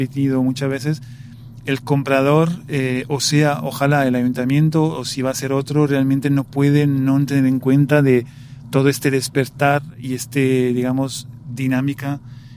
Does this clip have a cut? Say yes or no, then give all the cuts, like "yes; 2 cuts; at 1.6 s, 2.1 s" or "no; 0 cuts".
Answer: no; 0 cuts